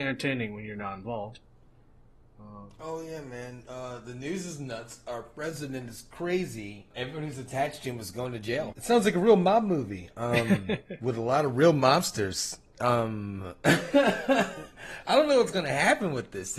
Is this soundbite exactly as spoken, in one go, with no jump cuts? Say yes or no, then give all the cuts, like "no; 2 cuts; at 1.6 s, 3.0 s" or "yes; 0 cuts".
no; 2 cuts; at 6.9 s, 8.7 s